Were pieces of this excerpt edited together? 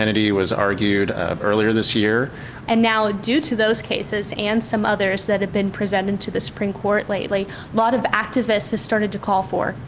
yes; 1 cut; at 2.7 s

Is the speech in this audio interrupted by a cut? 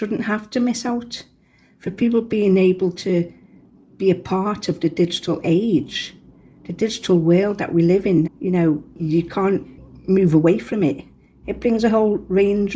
yes; 2 cuts; at 8.2 s, 11.4 s

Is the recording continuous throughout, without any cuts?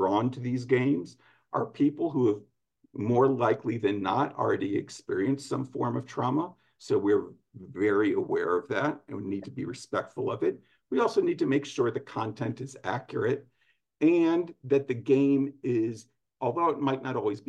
yes; 0 cuts

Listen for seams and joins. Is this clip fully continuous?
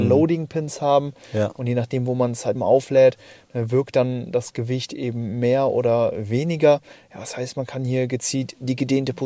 no; 1 cut; at 2.6 s

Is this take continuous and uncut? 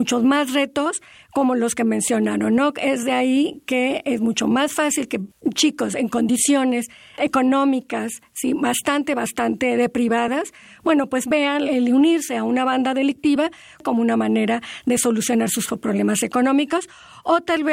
yes; 0 cuts

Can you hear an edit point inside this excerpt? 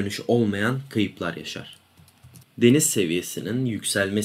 no; 0 cuts

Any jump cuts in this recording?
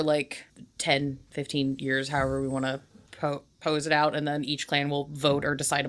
no; 0 cuts

